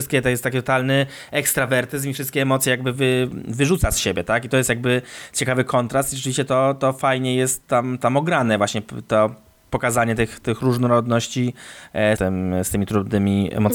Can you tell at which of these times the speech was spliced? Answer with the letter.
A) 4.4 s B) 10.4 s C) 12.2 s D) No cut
C